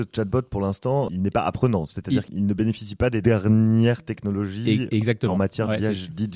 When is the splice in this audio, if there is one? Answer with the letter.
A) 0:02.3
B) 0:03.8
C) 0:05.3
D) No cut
D